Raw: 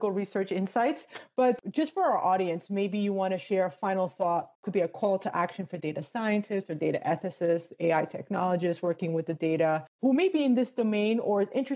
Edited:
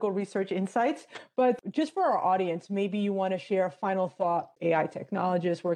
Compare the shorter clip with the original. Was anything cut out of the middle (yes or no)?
yes